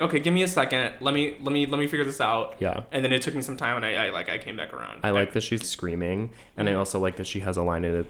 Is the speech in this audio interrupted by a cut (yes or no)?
yes